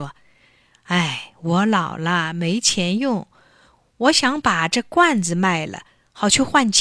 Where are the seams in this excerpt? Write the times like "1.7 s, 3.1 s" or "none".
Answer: none